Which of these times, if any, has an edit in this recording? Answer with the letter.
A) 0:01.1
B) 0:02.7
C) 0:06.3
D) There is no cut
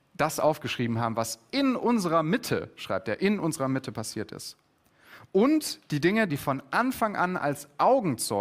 C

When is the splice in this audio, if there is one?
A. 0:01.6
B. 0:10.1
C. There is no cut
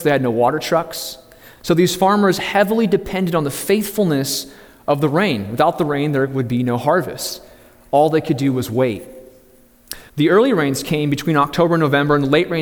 B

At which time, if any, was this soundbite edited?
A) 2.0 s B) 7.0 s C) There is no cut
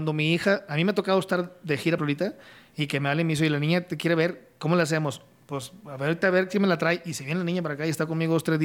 A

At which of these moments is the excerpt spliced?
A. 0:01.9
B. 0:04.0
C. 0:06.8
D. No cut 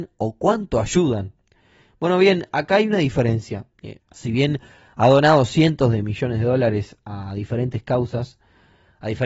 B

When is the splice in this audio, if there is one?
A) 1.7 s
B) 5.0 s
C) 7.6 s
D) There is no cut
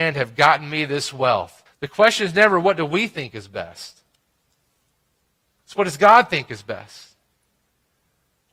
A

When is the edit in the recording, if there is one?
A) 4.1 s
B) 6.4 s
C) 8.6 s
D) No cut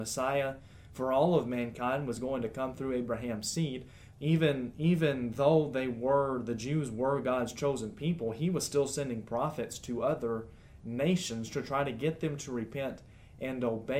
A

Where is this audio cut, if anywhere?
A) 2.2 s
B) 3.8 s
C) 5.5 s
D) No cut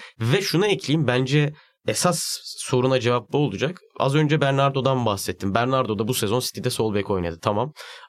D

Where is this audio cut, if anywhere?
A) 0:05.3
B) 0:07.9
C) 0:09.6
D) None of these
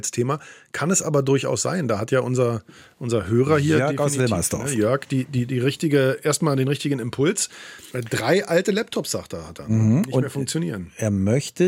B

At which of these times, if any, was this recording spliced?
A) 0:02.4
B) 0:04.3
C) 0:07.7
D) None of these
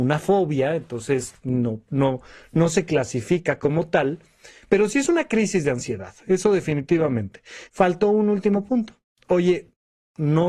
C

